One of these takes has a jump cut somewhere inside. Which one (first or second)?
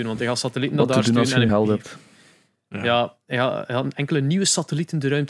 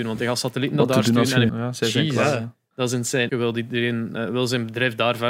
second